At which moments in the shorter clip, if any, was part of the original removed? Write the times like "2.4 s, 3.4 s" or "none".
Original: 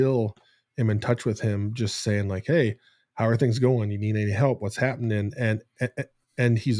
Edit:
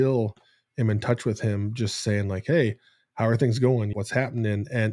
3.9 s